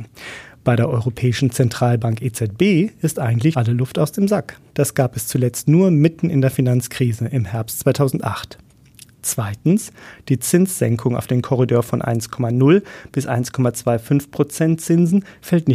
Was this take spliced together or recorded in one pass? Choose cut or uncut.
cut